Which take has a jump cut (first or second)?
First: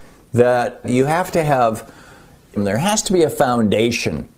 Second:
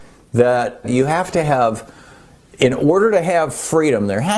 first